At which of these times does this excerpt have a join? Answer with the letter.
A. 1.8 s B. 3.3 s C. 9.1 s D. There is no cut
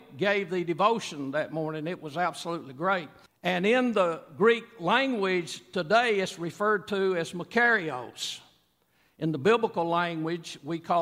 B